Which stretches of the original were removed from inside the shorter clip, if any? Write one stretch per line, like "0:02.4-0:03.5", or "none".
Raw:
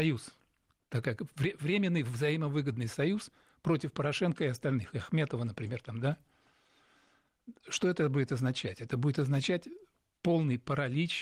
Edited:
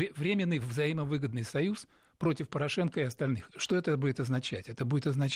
0:04.9-0:07.6